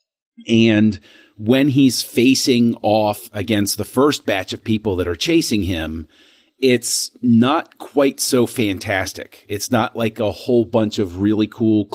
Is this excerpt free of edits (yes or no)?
yes